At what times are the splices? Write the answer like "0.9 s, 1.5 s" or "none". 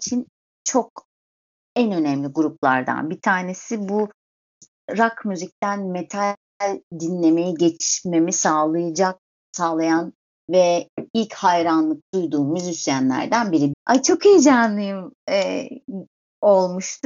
13.7 s